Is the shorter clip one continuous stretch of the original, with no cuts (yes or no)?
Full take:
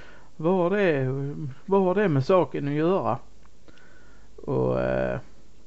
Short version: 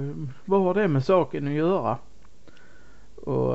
yes